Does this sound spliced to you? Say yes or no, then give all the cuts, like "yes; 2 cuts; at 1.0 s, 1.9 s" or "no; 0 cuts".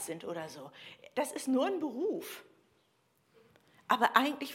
no; 0 cuts